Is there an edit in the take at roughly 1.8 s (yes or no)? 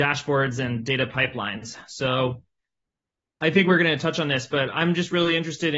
no